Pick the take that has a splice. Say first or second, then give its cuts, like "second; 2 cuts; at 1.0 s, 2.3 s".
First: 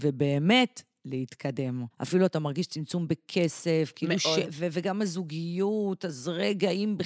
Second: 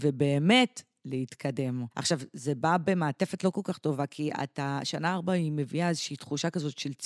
first; 2 cuts; at 1.9 s, 4.5 s